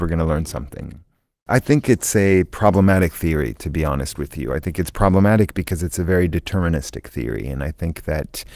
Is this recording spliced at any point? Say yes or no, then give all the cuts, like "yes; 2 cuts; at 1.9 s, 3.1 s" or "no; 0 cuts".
no; 0 cuts